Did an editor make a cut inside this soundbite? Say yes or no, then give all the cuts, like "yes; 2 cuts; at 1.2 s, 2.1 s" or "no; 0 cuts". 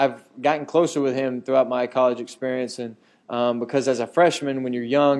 no; 0 cuts